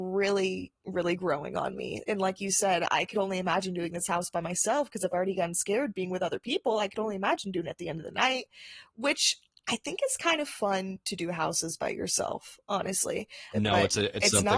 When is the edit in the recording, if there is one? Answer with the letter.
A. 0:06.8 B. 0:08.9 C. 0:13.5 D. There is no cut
C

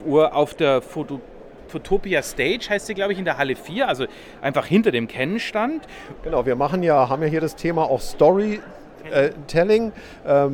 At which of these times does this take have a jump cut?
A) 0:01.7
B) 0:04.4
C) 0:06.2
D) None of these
C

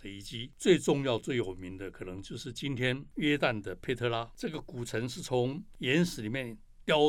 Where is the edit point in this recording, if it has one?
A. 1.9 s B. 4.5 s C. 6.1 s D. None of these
D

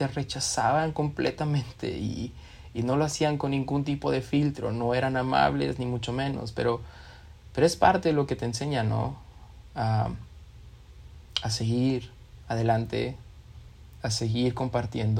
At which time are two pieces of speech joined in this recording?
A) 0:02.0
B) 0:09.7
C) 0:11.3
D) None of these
C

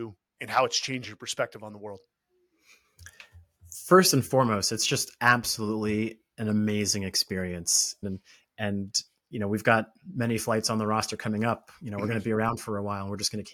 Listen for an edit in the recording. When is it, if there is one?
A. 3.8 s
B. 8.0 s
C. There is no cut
B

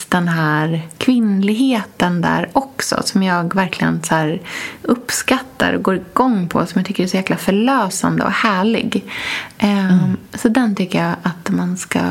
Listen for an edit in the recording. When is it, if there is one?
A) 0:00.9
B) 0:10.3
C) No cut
A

